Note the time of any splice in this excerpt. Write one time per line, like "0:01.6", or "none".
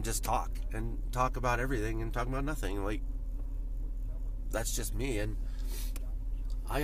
none